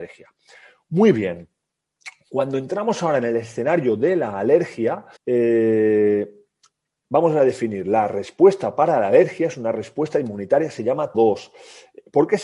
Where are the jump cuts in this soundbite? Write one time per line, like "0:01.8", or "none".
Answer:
0:05.2
0:11.1